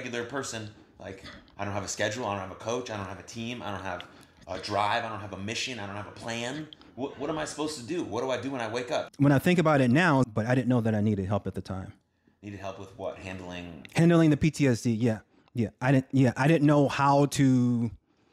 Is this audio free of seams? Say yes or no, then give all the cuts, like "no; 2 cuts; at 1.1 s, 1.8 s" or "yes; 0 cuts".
no; 2 cuts; at 9.1 s, 10.2 s